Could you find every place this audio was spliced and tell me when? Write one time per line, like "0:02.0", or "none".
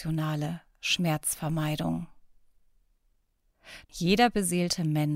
0:03.8